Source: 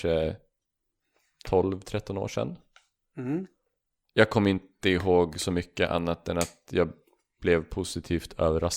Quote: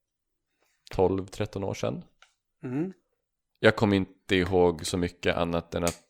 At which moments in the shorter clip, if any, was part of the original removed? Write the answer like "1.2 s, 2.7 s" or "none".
none